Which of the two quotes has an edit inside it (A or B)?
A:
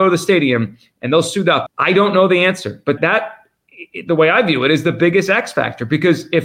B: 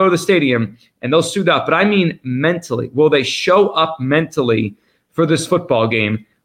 A